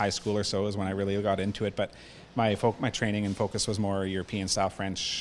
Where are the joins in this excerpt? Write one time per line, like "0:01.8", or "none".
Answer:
none

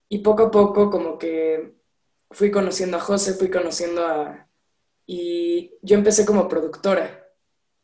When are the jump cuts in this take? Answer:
0:04.9

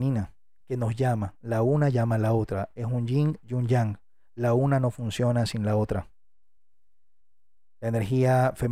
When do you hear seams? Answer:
none

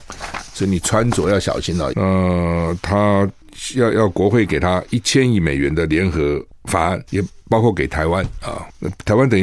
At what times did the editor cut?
0:01.9
0:07.1

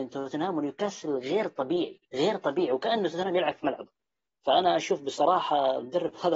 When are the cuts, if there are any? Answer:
0:02.1

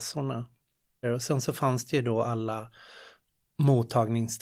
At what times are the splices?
0:01.0

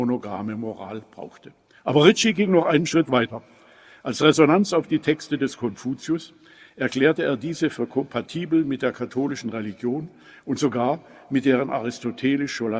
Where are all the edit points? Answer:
0:01.8

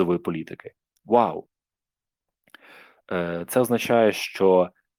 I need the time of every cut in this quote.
none

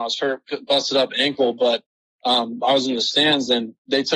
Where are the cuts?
none

